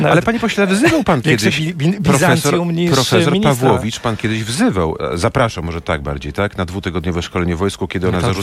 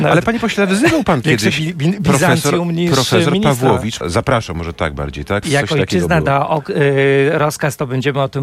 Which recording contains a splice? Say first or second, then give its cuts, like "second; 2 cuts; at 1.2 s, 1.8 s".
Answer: second; 2 cuts; at 4.0 s, 5.4 s